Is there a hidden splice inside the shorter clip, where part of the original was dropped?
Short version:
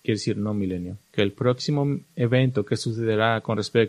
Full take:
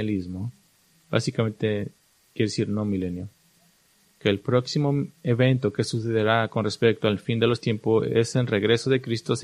yes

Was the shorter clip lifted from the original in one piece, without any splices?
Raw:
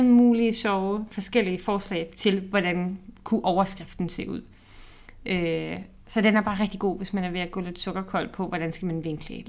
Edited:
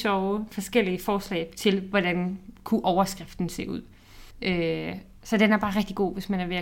no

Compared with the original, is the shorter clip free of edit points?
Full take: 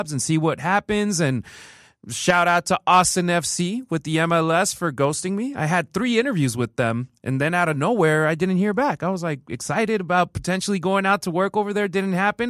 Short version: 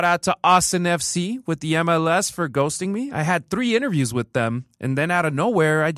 yes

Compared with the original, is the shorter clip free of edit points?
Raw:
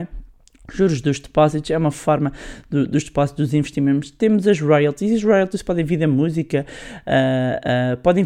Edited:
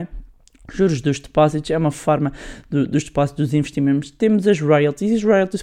yes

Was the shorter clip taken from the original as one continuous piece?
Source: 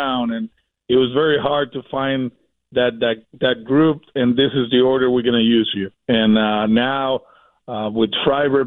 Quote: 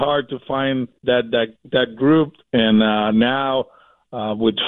no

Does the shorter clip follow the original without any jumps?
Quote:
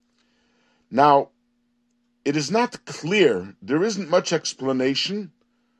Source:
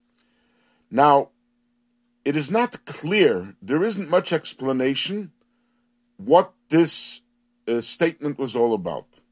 yes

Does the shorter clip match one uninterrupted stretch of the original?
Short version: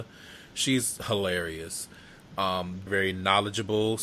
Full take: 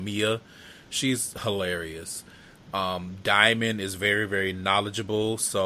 no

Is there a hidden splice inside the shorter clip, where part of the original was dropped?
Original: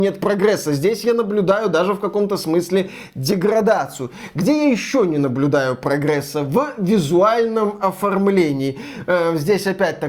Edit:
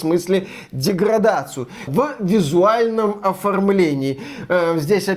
yes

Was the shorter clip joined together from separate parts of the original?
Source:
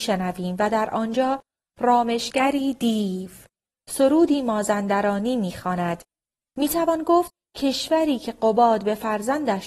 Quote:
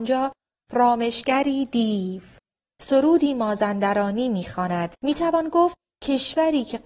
yes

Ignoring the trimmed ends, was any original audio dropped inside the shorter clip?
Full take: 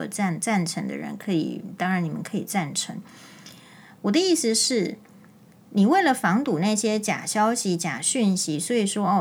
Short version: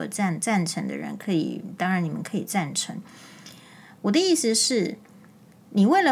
no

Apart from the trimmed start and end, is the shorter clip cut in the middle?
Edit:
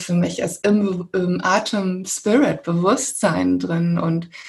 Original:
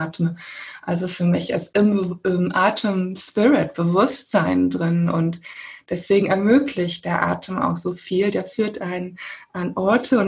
no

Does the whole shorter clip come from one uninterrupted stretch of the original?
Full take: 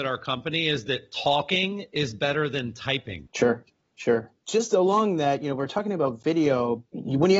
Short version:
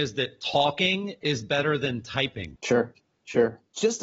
yes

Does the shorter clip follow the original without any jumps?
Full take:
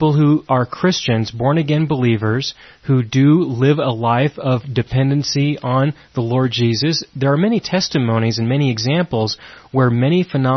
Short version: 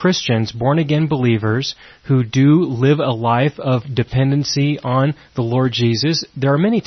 yes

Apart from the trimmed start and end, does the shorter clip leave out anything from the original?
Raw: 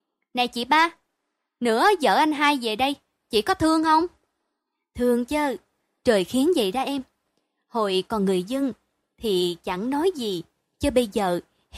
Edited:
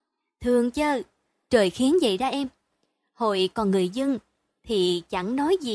no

